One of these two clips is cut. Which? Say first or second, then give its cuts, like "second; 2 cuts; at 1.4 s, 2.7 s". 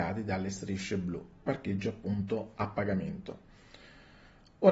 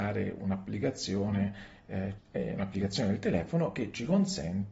second; 1 cut; at 2.2 s